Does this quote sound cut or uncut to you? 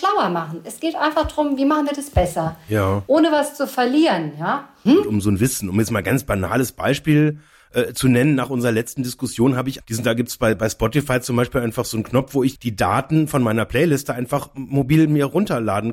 cut